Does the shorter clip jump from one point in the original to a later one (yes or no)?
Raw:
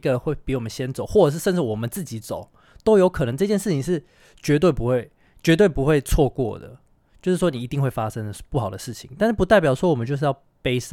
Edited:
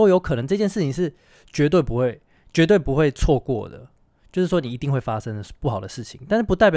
no